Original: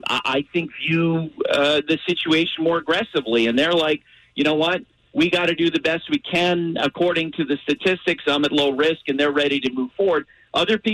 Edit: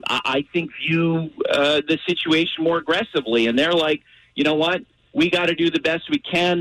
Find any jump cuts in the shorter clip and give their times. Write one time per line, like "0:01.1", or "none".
none